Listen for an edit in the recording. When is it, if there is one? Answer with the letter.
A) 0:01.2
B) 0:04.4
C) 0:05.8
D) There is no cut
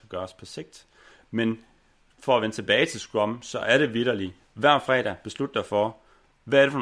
D